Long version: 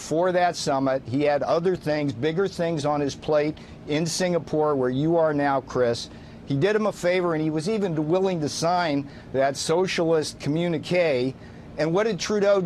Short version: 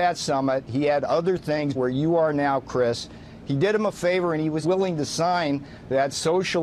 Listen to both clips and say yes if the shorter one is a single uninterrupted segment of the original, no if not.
no